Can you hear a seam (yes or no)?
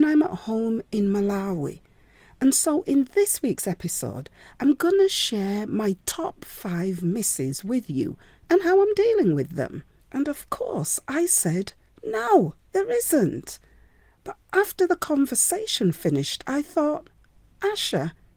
yes